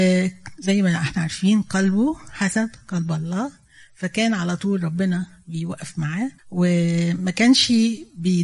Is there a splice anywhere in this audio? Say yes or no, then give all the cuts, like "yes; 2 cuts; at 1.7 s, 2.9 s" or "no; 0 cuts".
yes; 1 cut; at 6.4 s